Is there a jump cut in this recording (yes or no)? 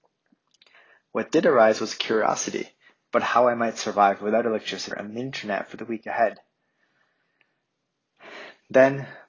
yes